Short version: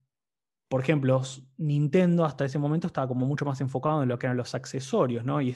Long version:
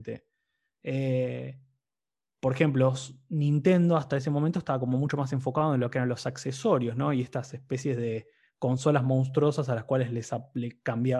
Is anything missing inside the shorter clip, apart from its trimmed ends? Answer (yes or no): no